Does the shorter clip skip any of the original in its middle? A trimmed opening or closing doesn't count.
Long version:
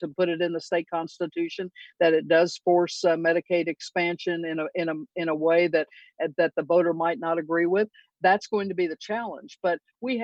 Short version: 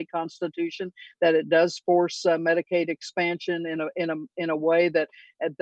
no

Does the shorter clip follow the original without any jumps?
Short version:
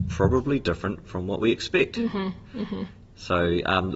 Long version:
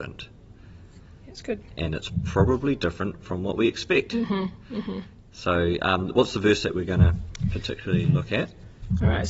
yes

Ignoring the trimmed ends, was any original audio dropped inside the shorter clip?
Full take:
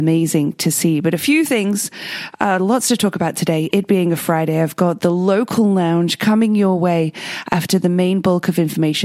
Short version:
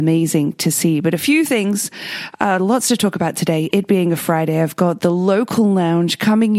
no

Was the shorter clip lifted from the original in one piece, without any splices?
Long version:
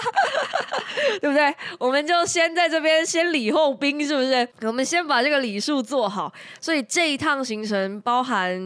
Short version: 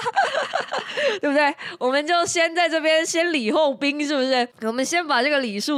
yes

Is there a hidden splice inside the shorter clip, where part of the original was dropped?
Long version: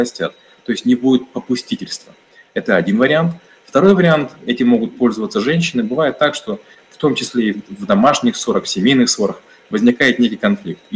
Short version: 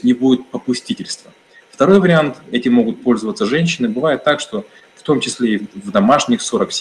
yes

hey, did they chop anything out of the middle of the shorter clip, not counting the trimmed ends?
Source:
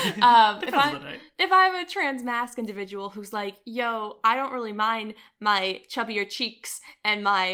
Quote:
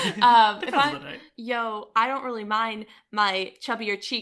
yes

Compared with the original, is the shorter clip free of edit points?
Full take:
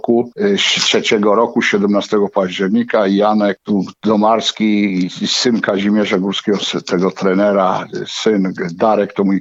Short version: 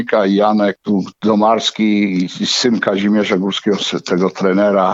yes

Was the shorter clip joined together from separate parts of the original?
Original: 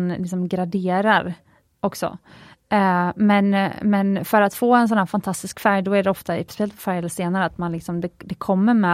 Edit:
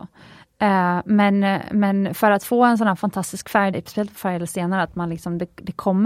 yes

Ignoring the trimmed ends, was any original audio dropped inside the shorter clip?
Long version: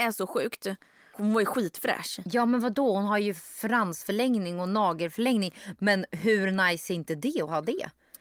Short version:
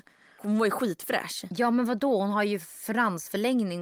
no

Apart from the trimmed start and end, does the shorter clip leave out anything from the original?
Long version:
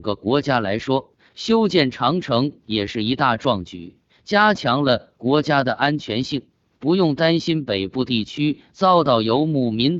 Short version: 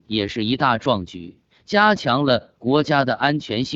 no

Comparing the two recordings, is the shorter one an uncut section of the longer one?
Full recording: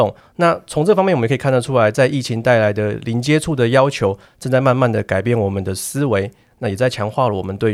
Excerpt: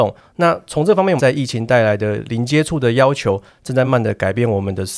no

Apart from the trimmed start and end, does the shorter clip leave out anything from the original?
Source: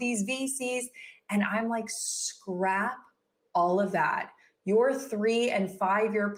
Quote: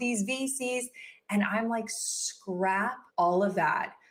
yes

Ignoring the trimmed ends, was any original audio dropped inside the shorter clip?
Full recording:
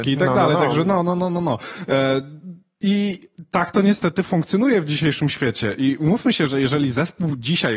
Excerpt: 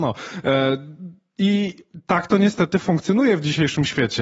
no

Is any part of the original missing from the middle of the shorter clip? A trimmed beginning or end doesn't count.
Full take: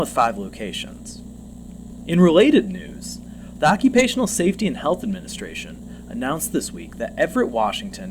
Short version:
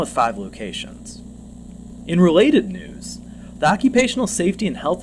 no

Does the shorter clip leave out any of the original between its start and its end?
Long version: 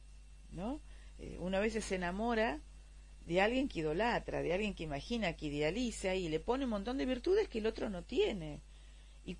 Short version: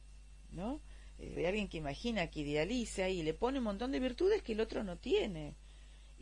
yes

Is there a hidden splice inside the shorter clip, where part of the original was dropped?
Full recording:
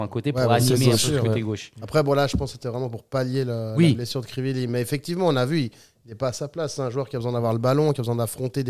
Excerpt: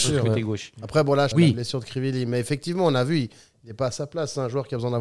yes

